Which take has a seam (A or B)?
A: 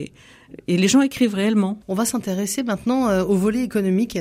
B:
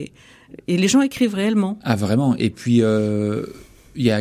A